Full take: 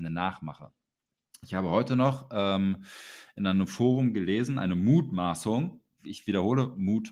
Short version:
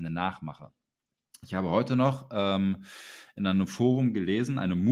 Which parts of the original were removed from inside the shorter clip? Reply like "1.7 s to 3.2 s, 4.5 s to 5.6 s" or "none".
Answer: none